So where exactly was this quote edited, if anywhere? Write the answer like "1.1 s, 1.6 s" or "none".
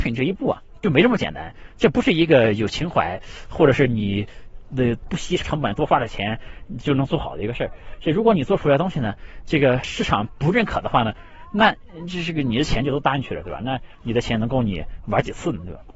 none